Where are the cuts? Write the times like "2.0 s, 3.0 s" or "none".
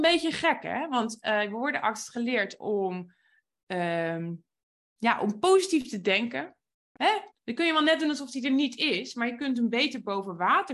7.3 s